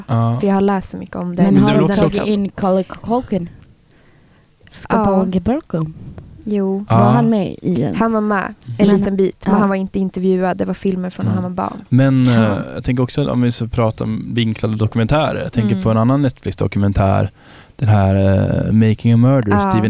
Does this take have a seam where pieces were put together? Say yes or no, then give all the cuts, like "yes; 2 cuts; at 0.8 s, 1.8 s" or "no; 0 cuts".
no; 0 cuts